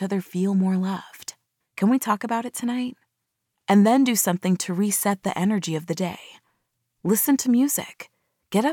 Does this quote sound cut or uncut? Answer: cut